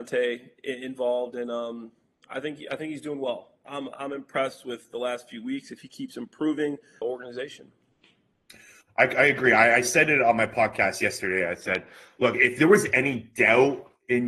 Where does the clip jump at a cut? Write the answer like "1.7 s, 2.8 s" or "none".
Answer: 7.0 s